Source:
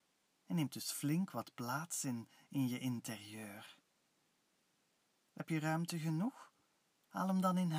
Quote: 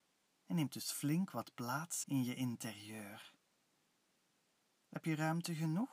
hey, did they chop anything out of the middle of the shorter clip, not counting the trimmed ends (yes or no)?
yes